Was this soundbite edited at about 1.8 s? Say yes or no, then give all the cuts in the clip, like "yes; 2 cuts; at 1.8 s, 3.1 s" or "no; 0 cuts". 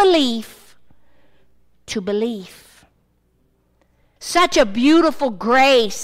no; 1 cut; at 4.2 s